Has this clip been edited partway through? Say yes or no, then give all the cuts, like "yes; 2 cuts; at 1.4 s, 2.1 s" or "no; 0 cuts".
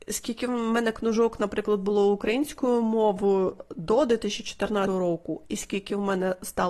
no; 0 cuts